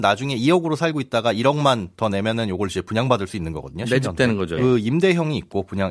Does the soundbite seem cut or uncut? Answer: cut